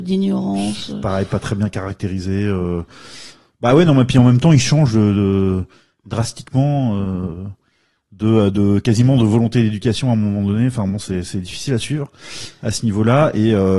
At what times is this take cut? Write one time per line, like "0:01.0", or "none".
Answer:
none